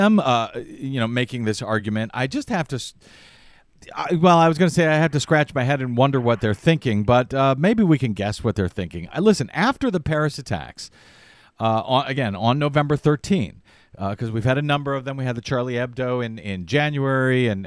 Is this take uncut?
no; 1 cut; at 9.1 s

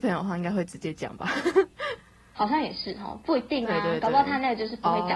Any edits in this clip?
no; 0 cuts

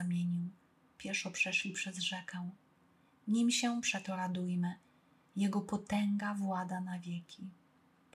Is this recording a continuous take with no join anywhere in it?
yes; 0 cuts

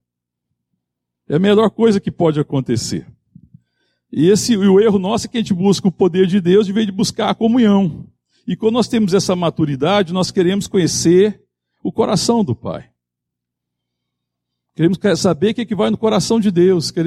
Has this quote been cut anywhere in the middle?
no; 0 cuts

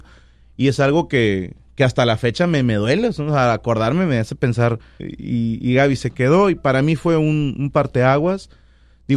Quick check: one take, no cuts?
no; 1 cut; at 5.0 s

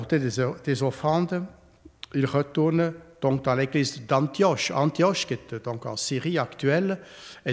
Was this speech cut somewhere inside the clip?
no; 0 cuts

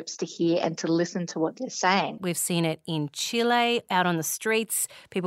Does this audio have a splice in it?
yes; 1 cut; at 2.2 s

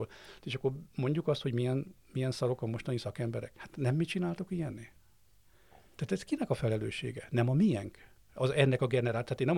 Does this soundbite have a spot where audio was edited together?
no; 0 cuts

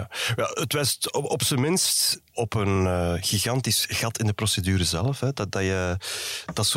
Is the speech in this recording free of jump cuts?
yes; 0 cuts

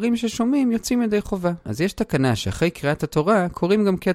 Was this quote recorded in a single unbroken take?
no; 1 cut; at 1.6 s

